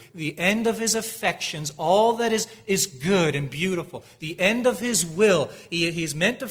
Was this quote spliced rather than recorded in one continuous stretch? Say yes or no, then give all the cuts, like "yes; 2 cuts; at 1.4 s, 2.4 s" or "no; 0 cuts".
no; 0 cuts